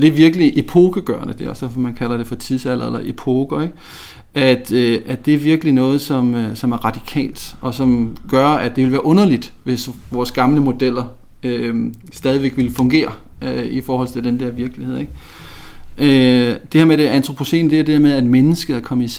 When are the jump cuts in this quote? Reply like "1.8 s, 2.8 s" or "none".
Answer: none